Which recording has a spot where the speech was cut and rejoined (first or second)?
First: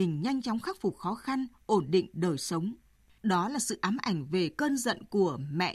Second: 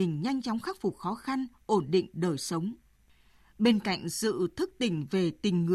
first